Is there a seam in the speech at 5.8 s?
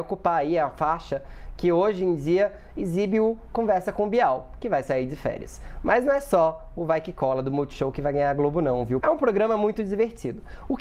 no; 1 cut; at 9.0 s

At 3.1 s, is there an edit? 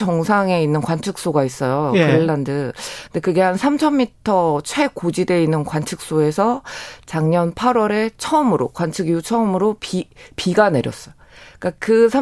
no; 0 cuts

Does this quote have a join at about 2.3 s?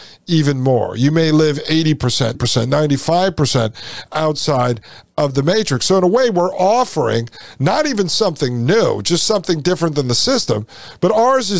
yes; 1 cut; at 2.3 s

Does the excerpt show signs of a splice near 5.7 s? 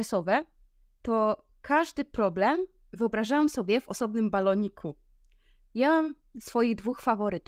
yes; 1 cut; at 5.7 s

